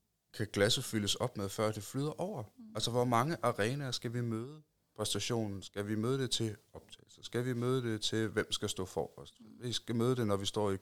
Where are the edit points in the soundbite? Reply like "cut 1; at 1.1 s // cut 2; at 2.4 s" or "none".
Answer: none